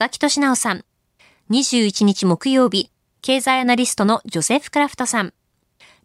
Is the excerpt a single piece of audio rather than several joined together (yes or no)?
yes